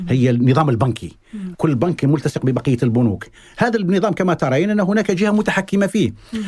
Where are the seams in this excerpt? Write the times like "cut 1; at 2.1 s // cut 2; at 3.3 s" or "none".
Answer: cut 1; at 1.5 s